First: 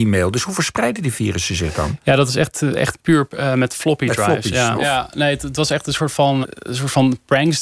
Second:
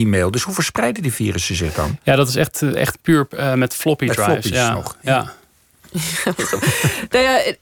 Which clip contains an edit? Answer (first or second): first